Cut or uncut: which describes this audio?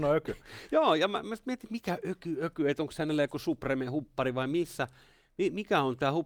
uncut